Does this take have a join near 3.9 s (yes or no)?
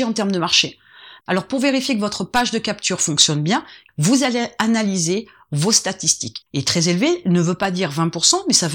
yes